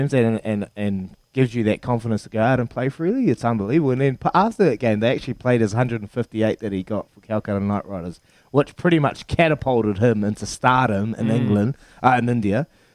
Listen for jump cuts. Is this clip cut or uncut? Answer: uncut